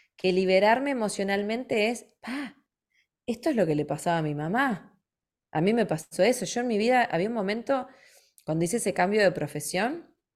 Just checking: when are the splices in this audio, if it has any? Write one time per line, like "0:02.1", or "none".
none